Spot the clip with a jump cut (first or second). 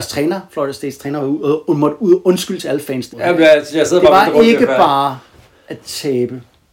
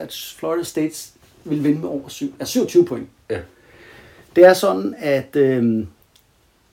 first